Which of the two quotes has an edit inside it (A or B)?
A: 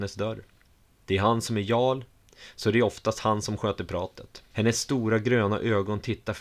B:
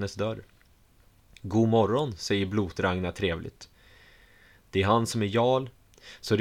A